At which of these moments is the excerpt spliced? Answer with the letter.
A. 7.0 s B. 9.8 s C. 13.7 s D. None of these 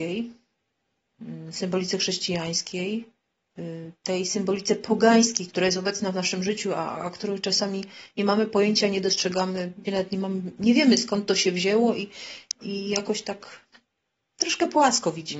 B